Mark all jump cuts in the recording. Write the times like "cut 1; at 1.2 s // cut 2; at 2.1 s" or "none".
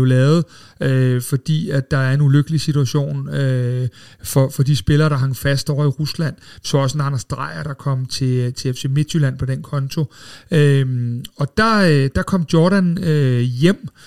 none